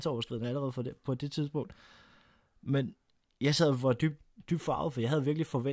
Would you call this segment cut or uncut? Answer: uncut